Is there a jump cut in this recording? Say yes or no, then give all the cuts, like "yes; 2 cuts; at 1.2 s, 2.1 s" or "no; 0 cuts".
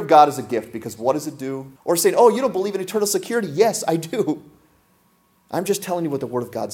yes; 1 cut; at 1.8 s